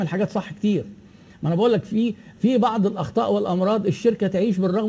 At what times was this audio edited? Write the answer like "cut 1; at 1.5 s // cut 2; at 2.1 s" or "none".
none